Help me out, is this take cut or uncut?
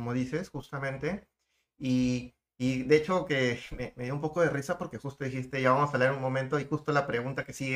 uncut